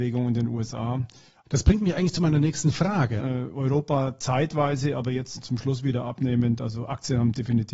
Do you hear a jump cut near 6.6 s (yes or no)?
no